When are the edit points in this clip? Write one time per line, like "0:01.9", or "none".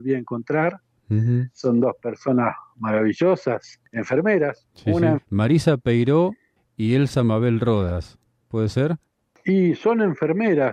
0:05.2